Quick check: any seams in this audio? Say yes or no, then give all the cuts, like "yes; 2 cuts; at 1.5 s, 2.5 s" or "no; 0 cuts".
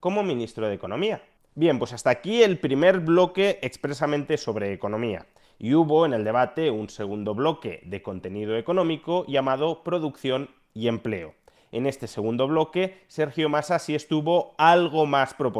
no; 0 cuts